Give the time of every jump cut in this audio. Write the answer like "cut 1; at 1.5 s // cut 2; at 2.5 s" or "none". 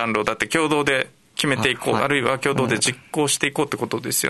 cut 1; at 2.0 s